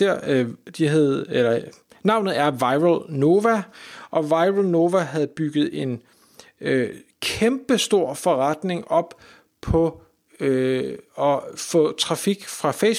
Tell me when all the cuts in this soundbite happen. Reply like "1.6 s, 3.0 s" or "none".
none